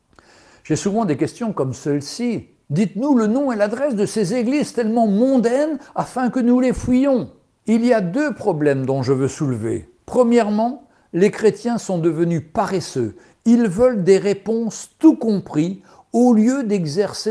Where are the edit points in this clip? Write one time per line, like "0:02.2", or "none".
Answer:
none